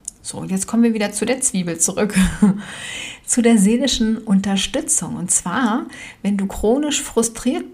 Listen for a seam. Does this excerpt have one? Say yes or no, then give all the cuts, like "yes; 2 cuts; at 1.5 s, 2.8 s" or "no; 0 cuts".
no; 0 cuts